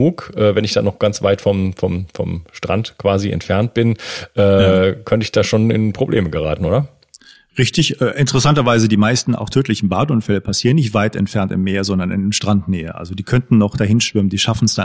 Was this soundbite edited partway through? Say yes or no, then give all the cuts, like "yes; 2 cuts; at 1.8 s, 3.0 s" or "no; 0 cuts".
no; 0 cuts